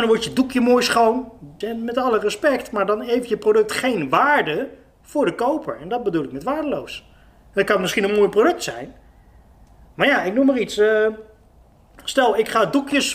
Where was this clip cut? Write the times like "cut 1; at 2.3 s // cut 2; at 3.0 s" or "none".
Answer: cut 1; at 1.6 s